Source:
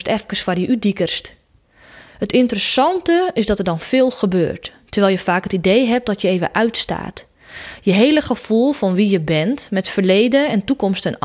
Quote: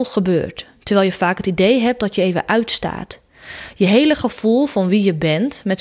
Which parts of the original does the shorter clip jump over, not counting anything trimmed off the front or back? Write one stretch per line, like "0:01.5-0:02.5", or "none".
none